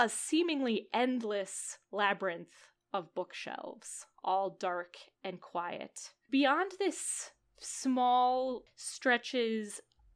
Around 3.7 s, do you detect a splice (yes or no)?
no